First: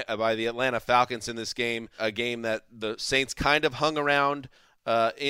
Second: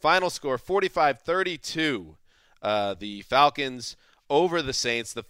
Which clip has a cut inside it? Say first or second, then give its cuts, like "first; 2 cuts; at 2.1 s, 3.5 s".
first; 1 cut; at 2.0 s